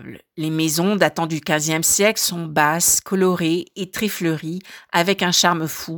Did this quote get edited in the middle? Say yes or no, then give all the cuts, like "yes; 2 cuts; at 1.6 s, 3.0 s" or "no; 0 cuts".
no; 0 cuts